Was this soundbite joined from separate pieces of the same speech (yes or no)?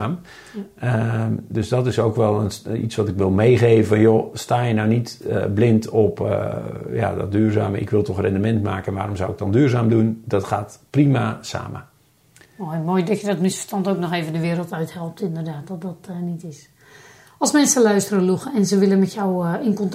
no